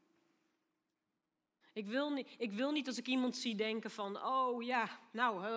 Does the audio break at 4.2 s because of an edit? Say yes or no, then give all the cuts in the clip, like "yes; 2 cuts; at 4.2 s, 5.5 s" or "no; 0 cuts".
no; 1 cut; at 1.6 s